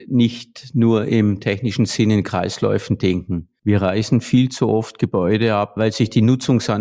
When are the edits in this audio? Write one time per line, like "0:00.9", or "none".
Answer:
none

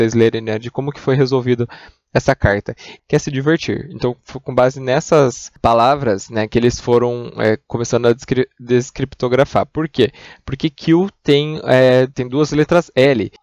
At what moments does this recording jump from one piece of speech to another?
0:03.0

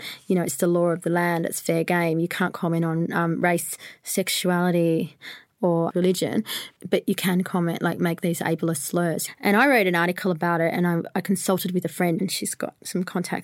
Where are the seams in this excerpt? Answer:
none

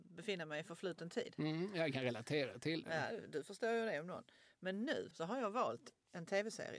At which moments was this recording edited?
0:05.1

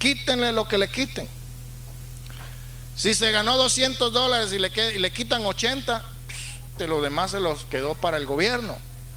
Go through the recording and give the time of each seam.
0:06.8

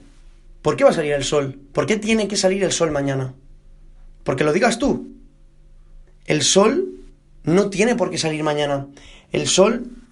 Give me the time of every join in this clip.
0:06.1

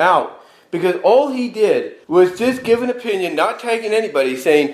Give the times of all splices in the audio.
0:02.0

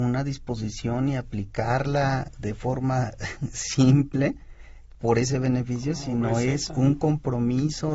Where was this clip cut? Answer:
none

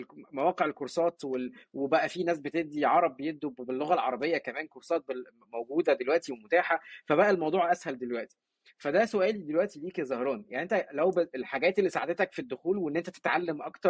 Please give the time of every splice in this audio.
0:11.3

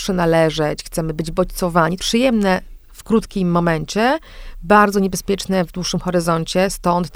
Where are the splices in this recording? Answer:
0:02.0

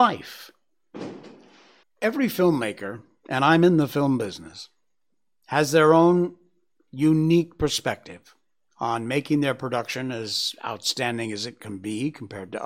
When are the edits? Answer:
0:01.8

